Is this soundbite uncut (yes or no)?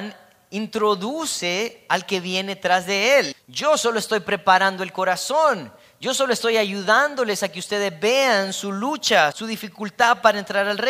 no